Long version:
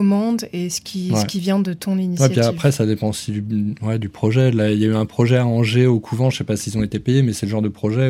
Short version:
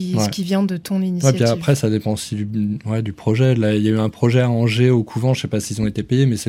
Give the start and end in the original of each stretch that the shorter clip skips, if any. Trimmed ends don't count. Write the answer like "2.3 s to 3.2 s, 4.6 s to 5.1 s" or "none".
none